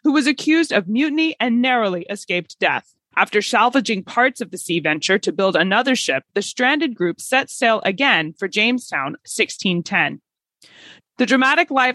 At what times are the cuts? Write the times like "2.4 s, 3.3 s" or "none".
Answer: 3.1 s, 9.2 s, 11.0 s